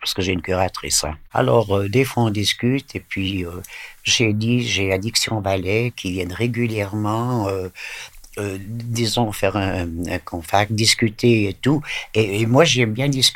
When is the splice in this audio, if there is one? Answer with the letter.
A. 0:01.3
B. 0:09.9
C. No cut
A